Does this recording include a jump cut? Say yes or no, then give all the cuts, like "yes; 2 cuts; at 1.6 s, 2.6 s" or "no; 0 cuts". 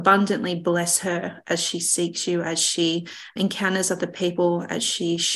yes; 1 cut; at 3.4 s